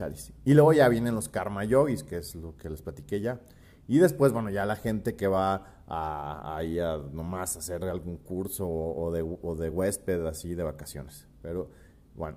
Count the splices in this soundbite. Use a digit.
0